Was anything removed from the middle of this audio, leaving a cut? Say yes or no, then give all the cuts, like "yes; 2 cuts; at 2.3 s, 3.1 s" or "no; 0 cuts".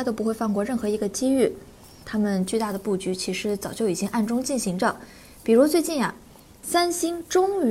yes; 1 cut; at 2.0 s